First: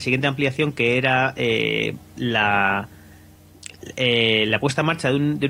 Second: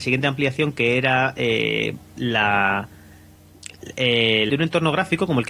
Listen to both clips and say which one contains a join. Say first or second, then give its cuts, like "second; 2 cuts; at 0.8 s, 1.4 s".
second; 1 cut; at 4.5 s